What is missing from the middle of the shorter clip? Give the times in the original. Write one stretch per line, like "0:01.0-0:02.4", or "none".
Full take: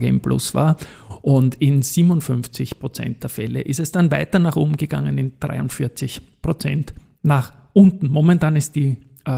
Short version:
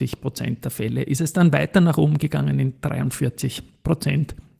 none

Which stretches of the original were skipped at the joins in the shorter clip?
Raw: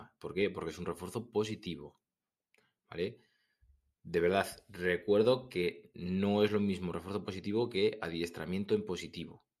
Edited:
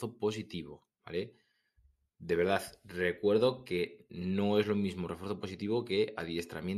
0:02.1-0:02.8

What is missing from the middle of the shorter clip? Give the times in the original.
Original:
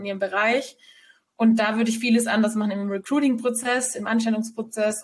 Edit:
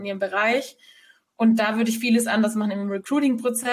none

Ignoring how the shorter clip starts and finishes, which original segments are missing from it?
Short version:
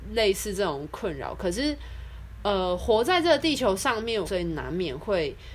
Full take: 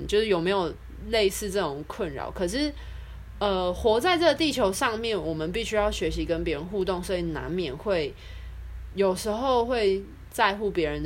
0:05.2-0:07.0

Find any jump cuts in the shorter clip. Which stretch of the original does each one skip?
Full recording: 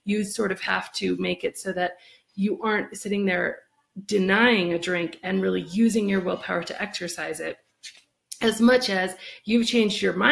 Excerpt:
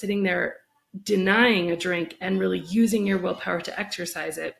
none

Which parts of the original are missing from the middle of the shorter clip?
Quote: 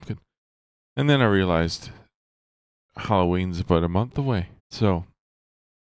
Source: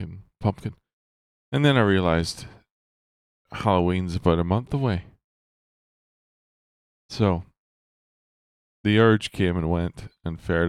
0:05.1-0:07.0

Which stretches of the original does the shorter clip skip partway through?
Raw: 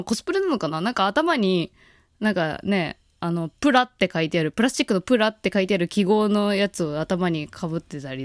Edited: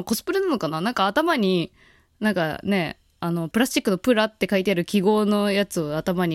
0:03.5-0:04.5

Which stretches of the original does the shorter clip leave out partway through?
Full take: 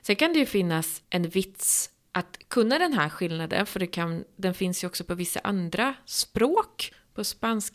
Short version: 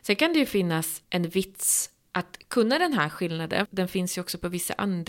0:03.7-0:04.3

